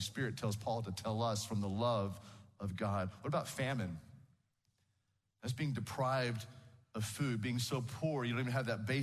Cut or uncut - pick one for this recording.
uncut